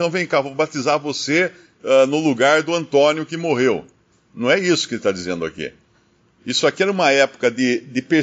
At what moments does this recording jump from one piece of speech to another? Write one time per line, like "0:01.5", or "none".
none